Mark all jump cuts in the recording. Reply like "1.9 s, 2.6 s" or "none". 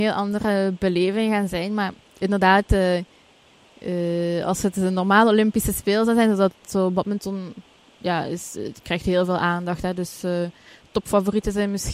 none